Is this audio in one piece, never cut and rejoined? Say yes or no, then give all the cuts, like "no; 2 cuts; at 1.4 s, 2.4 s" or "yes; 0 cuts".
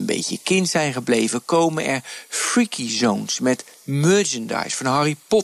yes; 0 cuts